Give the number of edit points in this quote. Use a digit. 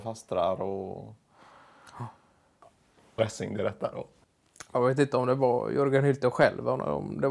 1